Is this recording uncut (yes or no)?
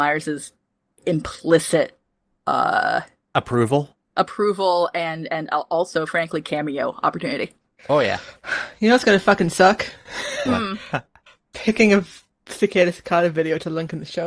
yes